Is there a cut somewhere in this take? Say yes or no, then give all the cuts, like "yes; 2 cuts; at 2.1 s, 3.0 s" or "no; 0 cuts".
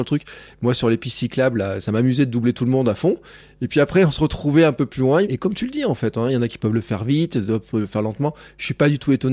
yes; 1 cut; at 5.2 s